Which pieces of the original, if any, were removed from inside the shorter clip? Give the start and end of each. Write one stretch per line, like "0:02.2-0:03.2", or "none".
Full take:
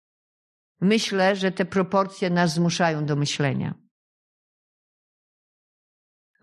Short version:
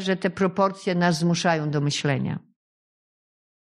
none